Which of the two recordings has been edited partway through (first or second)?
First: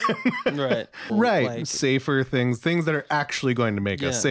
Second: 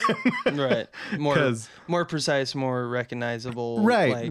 first